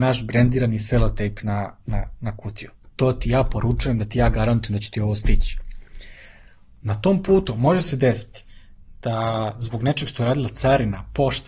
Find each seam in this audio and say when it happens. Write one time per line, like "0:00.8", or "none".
none